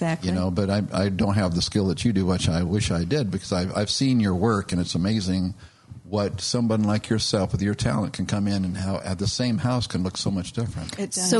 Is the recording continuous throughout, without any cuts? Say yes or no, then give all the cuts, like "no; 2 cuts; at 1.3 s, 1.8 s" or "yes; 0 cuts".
yes; 0 cuts